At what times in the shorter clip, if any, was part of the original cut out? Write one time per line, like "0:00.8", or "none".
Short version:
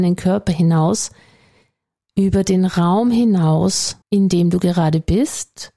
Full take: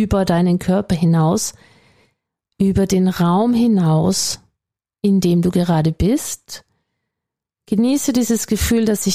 0:04.0